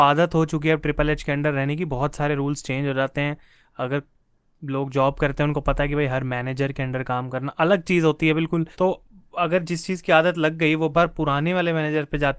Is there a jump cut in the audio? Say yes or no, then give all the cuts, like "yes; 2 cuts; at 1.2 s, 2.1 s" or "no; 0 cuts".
yes; 2 cuts; at 8.7 s, 10.9 s